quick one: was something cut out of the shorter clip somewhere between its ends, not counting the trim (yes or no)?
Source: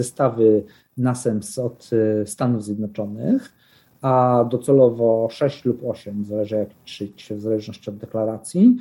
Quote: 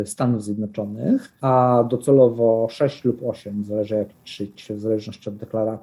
yes